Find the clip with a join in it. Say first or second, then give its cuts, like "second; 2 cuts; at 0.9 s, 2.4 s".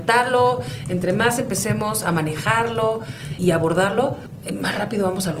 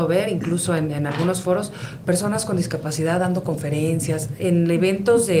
first; 1 cut; at 3.4 s